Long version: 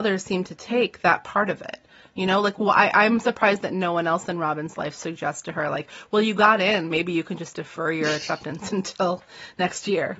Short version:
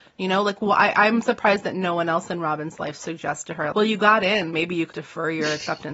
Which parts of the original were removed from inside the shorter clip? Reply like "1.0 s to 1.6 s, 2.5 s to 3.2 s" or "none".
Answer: 5.7 s to 6.1 s, 7.3 s to 7.5 s